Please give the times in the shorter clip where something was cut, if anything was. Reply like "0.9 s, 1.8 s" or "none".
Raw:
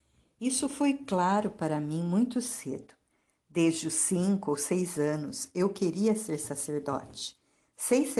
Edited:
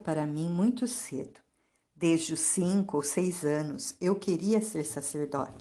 none